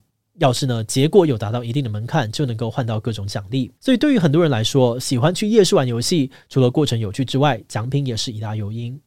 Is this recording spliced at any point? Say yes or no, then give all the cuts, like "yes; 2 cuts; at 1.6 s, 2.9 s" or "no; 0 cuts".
yes; 1 cut; at 3.8 s